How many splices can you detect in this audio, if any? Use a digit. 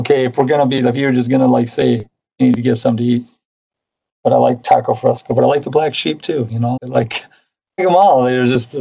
2